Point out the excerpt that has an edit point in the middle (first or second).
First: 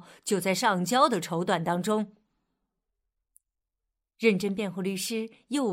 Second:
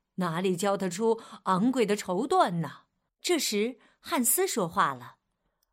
second